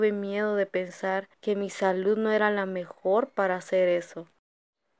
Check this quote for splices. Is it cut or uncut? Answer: cut